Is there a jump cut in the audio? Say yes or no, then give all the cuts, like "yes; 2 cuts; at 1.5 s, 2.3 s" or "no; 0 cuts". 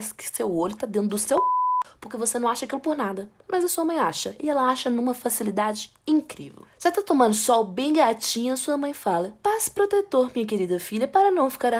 no; 0 cuts